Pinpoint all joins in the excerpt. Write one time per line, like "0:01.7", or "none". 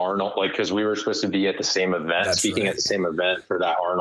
none

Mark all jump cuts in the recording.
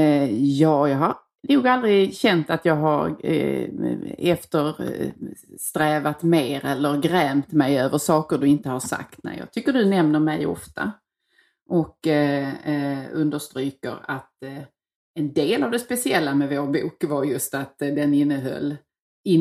none

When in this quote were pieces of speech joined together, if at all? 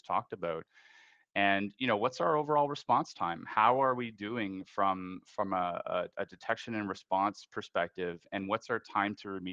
none

